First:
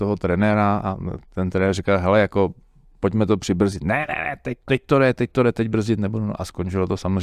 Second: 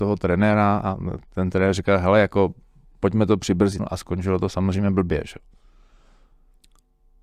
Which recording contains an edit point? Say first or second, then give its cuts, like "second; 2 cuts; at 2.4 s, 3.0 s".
second; 1 cut; at 3.8 s